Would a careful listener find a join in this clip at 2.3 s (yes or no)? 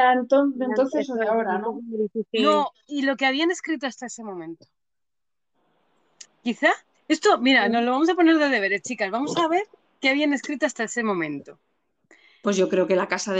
no